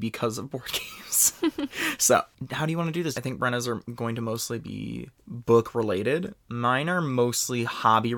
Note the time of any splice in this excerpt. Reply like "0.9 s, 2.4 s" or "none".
3.1 s